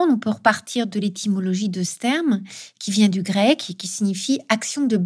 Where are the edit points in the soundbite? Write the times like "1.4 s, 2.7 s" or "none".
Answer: none